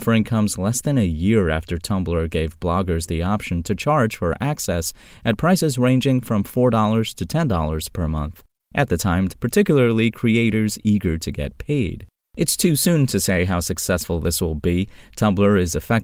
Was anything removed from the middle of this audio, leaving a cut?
yes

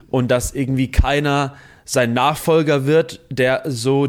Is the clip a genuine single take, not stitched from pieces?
yes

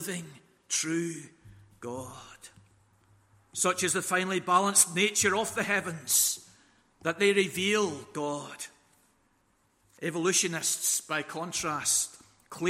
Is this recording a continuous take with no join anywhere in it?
yes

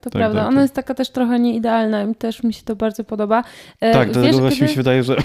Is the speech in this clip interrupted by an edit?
no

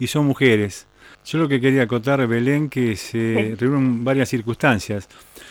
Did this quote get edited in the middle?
yes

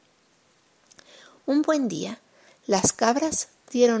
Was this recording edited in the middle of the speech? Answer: yes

